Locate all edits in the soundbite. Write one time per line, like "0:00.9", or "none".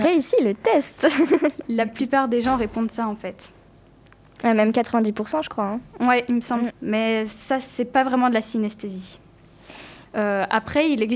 0:06.7
0:10.0